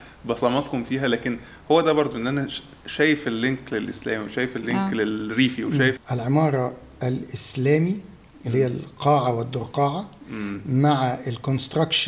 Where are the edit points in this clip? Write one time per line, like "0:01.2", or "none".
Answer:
0:06.0